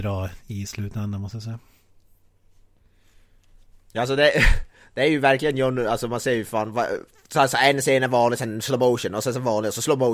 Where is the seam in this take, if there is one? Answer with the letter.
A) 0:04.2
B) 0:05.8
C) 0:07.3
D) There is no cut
D